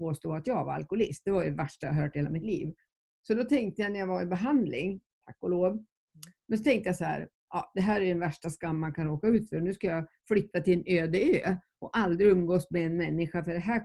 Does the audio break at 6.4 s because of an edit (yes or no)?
no